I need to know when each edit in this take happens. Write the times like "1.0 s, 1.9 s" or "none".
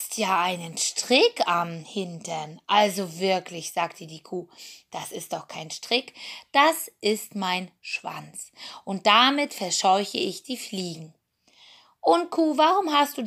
none